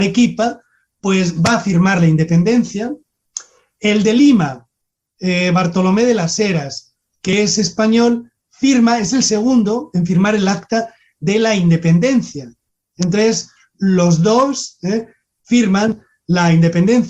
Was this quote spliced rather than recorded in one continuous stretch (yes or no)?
no